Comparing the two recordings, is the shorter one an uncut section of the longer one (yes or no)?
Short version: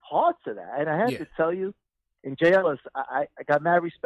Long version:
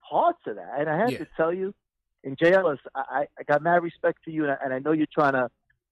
yes